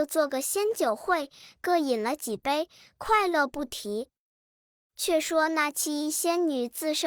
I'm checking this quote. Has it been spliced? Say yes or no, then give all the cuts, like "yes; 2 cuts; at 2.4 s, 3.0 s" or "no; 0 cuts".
no; 0 cuts